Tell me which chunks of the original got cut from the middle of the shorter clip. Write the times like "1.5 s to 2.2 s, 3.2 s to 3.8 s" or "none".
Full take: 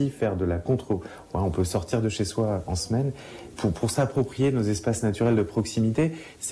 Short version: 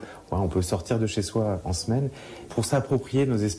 3.5 s to 3.7 s